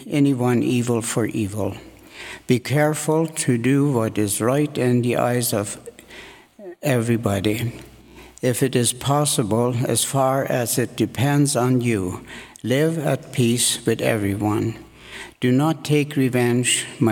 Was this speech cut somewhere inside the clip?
no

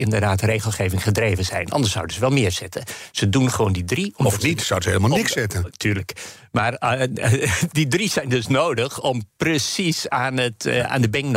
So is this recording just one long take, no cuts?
no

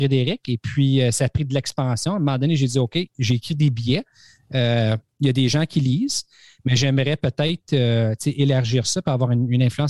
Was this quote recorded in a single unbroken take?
yes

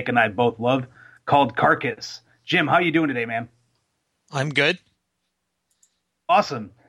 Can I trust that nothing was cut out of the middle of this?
yes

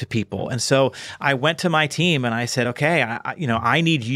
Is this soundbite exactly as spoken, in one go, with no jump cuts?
yes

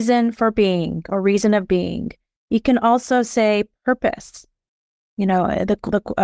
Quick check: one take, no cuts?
yes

